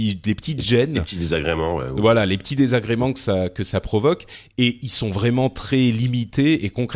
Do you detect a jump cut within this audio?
no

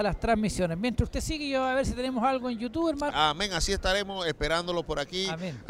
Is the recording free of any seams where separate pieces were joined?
no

